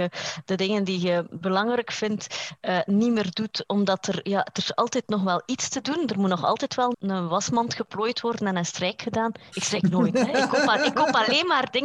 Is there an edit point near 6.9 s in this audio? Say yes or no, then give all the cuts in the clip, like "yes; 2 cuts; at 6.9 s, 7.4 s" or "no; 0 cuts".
yes; 2 cuts; at 6.9 s, 9.5 s